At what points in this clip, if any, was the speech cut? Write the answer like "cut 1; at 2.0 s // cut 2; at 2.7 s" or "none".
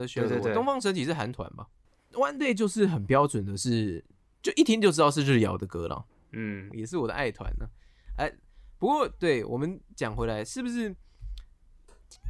cut 1; at 6.7 s